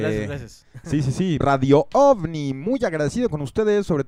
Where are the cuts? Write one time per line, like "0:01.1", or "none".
0:01.4